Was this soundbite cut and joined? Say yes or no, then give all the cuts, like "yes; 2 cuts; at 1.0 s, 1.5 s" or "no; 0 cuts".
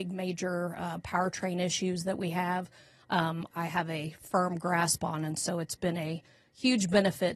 yes; 1 cut; at 3.5 s